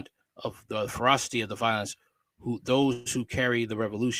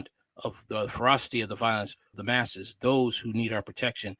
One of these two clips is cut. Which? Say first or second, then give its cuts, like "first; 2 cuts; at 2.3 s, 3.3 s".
second; 1 cut; at 2.1 s